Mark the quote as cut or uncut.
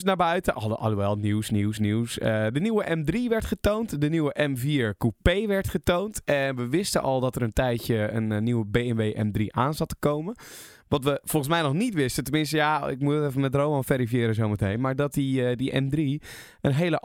uncut